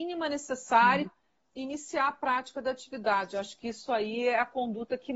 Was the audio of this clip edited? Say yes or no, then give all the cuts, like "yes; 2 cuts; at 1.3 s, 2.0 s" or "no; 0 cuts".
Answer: yes; 1 cut; at 1.0 s